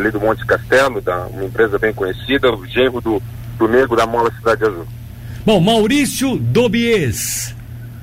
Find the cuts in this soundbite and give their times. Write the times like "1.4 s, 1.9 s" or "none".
none